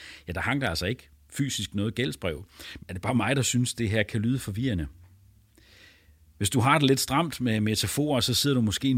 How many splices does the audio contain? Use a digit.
1